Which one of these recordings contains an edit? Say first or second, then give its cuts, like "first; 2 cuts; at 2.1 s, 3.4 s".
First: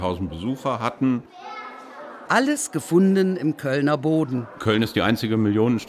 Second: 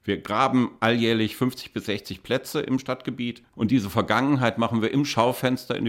first; 1 cut; at 2.3 s